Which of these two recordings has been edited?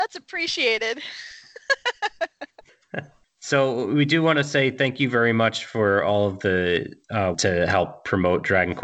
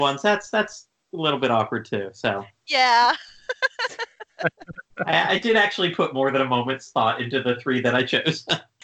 first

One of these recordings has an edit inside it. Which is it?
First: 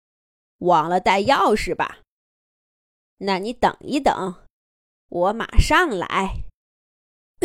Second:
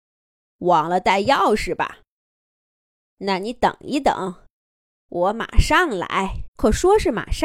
second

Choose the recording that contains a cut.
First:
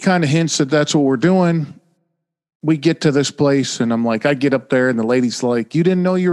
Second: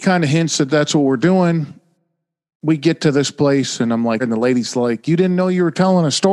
second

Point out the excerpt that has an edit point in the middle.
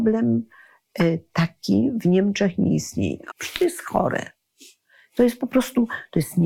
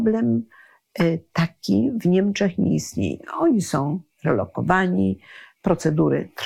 first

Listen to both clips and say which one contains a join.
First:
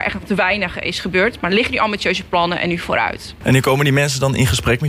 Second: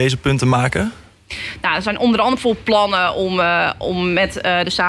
first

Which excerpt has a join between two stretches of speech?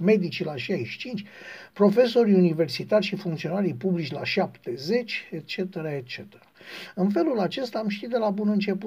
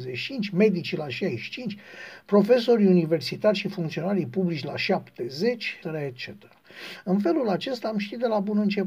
second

